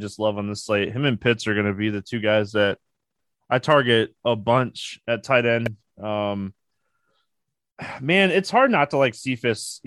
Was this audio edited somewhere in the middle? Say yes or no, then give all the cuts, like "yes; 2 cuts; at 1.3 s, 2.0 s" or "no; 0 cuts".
no; 0 cuts